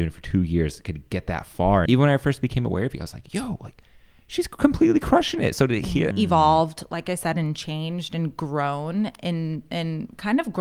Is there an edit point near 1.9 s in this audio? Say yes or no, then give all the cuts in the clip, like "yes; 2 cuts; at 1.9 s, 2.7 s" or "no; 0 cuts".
yes; 2 cuts; at 1.9 s, 6.1 s